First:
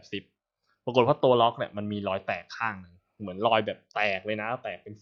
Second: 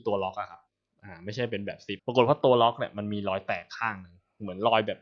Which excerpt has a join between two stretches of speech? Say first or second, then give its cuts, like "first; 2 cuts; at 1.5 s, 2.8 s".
second; 1 cut; at 2.0 s